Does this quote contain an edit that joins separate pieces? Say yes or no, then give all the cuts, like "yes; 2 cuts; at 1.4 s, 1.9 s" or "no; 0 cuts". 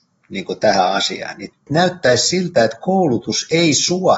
no; 0 cuts